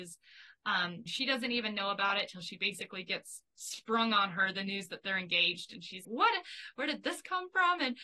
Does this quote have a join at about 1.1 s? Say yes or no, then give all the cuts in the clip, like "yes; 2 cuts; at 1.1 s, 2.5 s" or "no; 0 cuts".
yes; 2 cuts; at 1.1 s, 6.0 s